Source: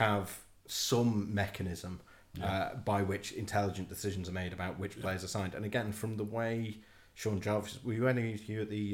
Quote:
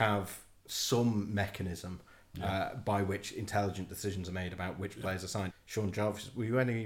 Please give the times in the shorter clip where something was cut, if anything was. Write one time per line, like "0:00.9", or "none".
0:05.5

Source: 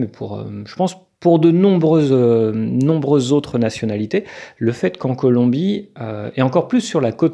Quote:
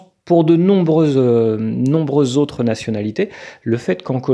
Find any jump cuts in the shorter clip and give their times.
none

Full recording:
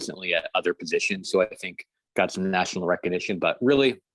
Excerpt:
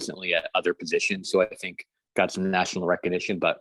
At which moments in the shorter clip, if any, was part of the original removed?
none

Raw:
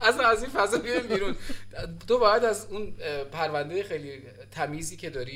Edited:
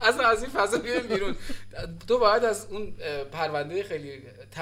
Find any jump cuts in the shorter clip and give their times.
none

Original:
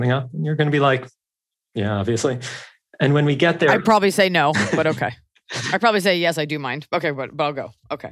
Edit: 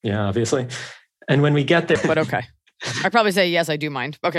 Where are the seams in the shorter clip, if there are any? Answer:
0:02.0

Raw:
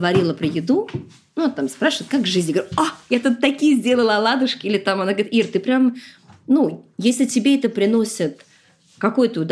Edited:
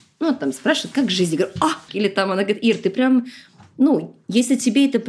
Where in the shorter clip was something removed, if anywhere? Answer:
0:01.9

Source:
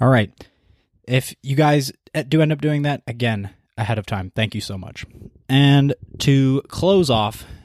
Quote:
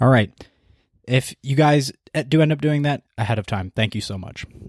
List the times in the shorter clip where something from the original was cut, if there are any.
0:03.0

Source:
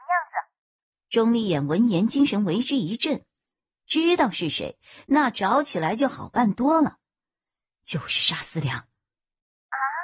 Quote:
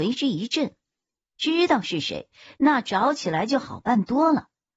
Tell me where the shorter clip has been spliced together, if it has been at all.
none

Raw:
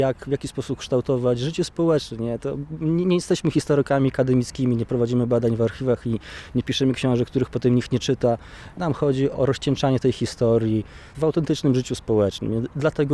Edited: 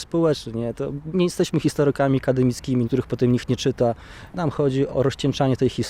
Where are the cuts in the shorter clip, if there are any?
0:01.1
0:02.9

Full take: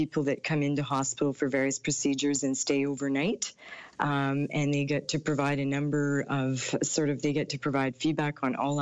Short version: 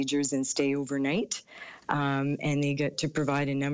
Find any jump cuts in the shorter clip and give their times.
none

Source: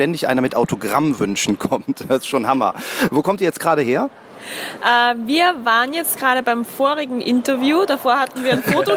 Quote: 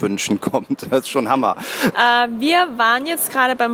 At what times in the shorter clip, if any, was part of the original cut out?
0:01.9

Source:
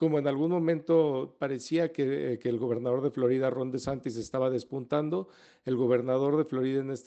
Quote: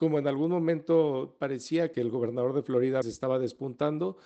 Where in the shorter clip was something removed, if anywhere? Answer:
0:01.9
0:03.0

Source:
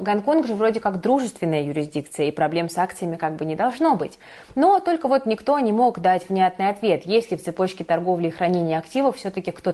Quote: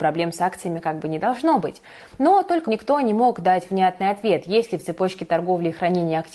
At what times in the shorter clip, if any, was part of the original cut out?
0:02.7

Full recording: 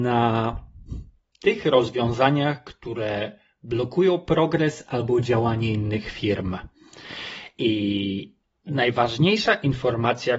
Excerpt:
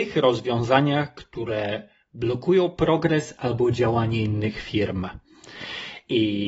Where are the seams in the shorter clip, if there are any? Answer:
none

